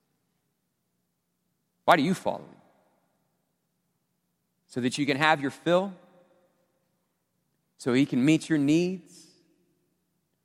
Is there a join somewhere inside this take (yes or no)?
no